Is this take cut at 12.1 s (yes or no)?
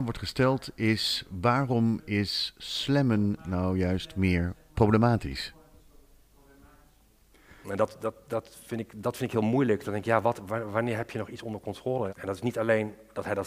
yes